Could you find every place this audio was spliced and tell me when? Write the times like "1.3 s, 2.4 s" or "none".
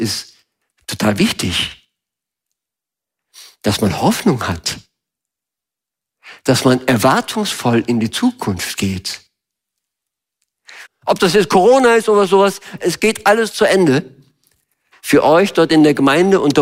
10.9 s, 12.8 s, 14.9 s